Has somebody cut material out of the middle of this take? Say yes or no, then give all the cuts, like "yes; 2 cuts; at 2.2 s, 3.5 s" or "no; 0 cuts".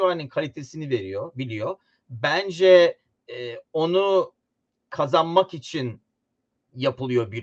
no; 0 cuts